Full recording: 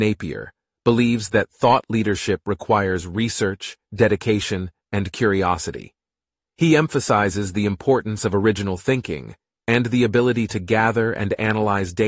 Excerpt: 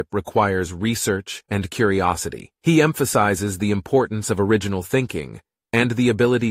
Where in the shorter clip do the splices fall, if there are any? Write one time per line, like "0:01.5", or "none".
0:01.5
0:02.6